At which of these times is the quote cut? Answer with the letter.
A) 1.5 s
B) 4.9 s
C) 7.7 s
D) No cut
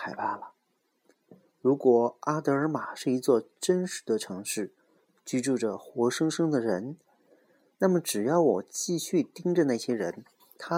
D